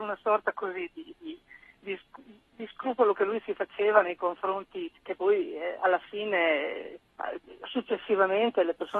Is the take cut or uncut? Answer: cut